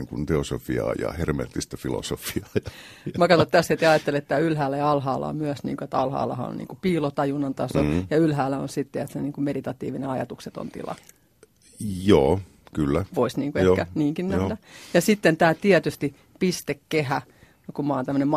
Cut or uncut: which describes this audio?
uncut